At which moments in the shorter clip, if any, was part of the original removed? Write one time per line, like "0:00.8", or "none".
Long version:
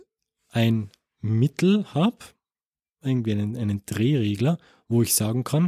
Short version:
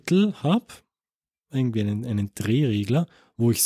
none